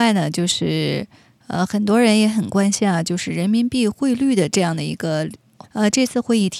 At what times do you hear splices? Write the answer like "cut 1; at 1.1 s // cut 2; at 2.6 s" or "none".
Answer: cut 1; at 5.6 s